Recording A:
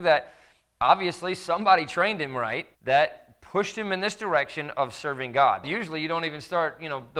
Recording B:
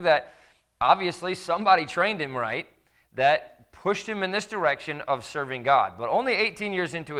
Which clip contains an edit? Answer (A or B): A